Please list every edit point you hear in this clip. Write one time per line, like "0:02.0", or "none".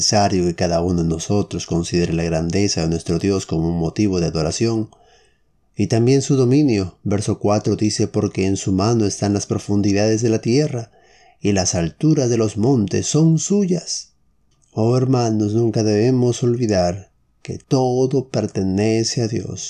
0:14.5

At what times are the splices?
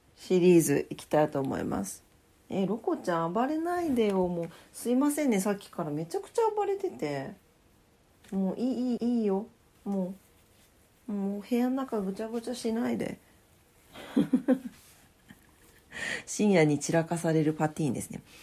0:09.0

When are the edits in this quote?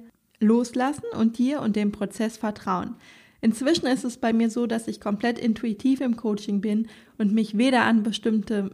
none

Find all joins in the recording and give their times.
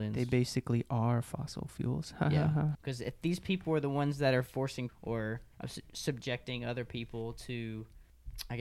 0:02.7

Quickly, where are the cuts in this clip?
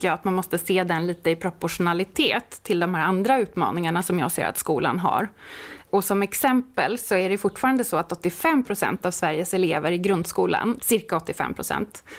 0:10.8

